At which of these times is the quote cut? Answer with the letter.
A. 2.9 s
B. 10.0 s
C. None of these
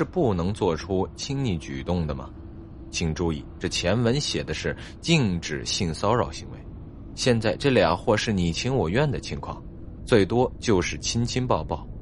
B